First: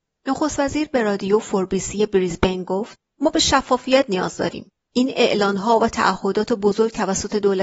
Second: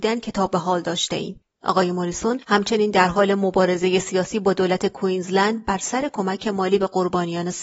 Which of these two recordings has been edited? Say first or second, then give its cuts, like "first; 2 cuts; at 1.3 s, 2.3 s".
second; 1 cut; at 1.5 s